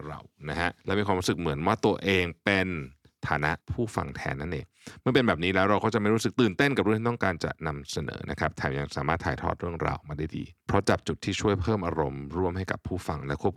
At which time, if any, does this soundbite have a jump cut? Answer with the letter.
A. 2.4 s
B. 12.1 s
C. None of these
C